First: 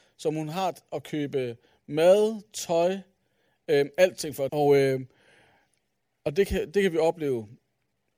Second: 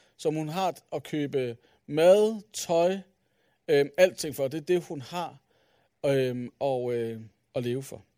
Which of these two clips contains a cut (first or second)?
first